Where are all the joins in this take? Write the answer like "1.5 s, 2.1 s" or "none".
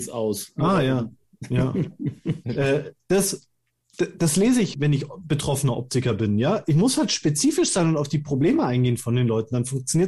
2.4 s, 4.7 s